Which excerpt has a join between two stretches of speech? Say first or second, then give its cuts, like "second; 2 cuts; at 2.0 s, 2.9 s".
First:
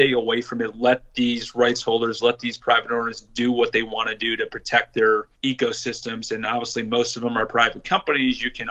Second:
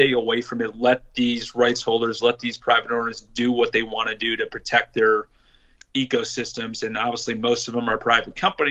first; 1 cut; at 5.3 s